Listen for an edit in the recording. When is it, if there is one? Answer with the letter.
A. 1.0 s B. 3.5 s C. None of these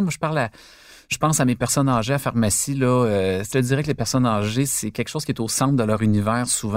B